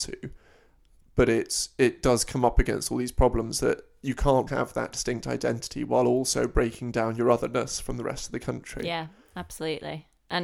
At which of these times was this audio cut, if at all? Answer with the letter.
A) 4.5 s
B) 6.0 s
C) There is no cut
A